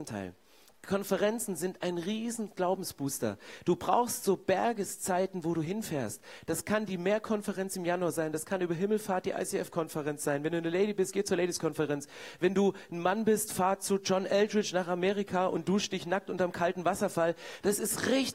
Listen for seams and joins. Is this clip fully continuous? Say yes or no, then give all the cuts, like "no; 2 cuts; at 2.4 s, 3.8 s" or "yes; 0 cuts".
yes; 0 cuts